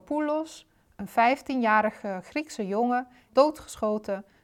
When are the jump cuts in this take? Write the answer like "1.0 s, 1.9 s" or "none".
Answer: 3.3 s